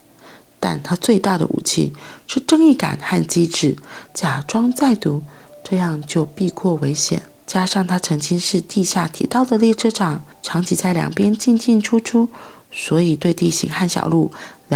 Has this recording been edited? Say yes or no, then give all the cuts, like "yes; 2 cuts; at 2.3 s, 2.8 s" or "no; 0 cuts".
yes; 2 cuts; at 4.1 s, 7.4 s